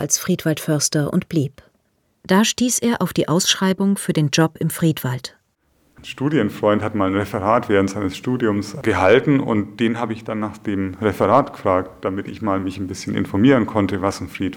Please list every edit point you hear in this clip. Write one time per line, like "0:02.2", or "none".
0:02.2